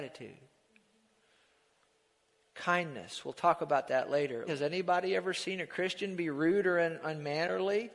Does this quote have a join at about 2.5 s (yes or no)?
no